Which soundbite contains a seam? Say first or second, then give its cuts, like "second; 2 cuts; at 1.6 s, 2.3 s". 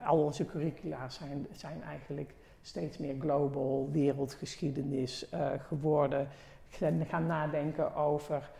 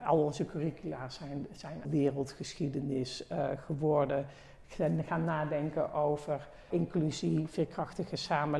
second; 2 cuts; at 1.8 s, 6.7 s